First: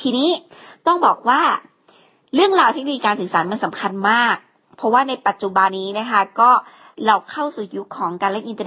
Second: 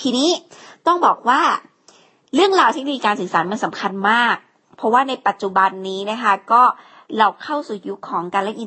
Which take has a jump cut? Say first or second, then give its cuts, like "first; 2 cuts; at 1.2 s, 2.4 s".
first; 1 cut; at 5.7 s